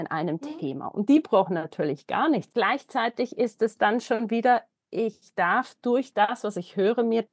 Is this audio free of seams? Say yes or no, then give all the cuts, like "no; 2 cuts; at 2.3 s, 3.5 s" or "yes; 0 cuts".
no; 1 cut; at 2.5 s